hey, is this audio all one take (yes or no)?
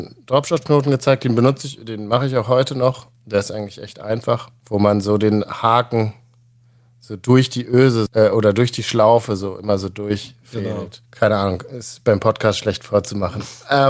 no